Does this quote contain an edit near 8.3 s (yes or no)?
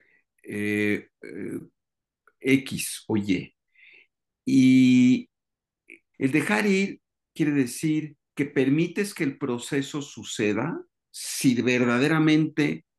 yes